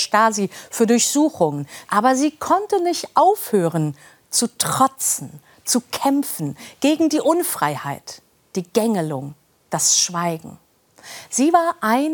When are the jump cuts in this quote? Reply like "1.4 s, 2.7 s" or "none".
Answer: 1.8 s